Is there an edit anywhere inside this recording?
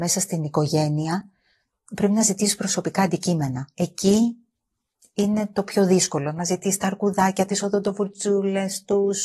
no; 0 cuts

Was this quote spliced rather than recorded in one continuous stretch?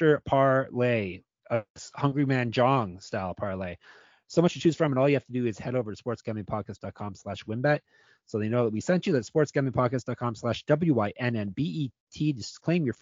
no; 0 cuts

